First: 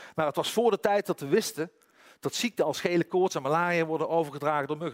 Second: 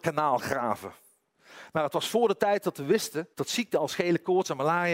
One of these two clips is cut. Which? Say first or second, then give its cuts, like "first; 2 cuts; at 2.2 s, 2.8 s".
second; 1 cut; at 3.3 s